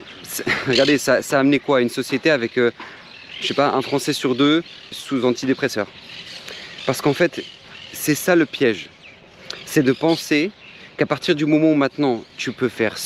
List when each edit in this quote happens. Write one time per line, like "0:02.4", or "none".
0:04.9